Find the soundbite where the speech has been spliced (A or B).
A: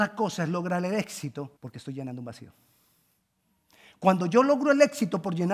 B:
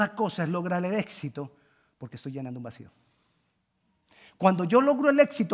A